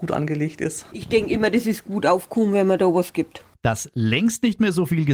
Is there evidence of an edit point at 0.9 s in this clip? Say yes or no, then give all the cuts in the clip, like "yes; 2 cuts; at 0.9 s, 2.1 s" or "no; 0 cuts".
no; 0 cuts